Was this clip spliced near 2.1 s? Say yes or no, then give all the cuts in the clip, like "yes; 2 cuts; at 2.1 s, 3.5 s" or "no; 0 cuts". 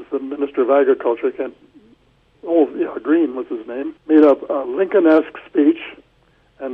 no; 1 cut; at 4.0 s